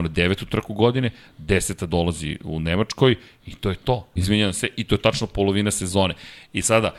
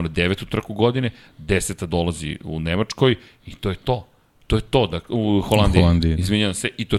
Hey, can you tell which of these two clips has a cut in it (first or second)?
first